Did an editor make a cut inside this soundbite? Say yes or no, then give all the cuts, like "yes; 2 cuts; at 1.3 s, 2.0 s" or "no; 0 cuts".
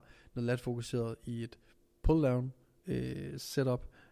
no; 0 cuts